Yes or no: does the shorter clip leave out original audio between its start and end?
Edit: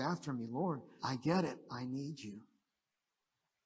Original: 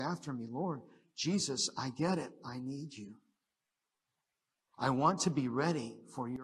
yes